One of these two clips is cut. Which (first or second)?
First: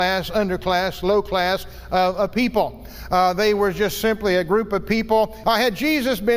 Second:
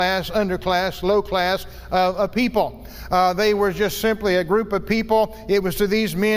first